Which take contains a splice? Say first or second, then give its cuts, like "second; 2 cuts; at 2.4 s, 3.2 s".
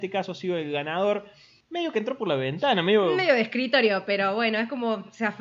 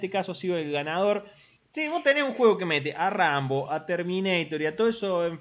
second; 2 cuts; at 1.6 s, 3.7 s